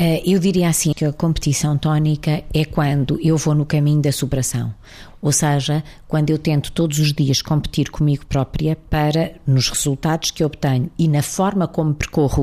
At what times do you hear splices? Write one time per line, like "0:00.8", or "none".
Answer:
0:00.9